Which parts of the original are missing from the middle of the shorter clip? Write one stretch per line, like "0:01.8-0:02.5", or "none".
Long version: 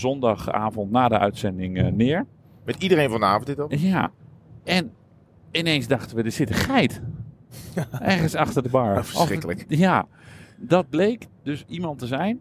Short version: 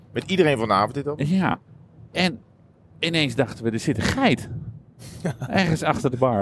none